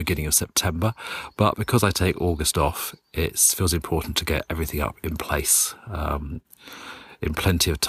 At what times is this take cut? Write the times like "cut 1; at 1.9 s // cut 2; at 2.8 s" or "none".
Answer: none